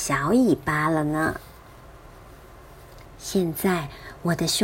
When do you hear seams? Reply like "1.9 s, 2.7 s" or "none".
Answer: 3.0 s